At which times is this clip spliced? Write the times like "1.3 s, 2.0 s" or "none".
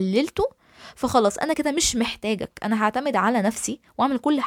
1.5 s